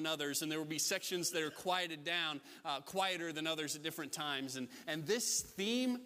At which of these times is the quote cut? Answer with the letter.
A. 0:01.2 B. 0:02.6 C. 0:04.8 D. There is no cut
D